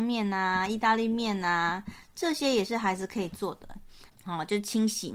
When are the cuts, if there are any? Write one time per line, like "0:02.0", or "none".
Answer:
0:04.1